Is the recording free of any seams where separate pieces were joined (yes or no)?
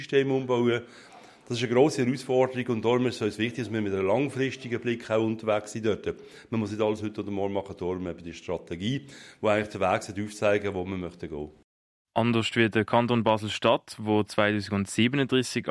yes